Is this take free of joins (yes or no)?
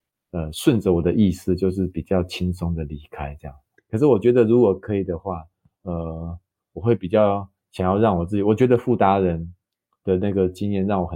no